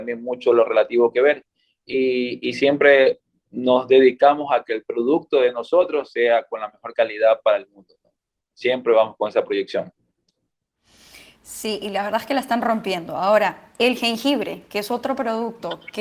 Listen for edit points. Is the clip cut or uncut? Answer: uncut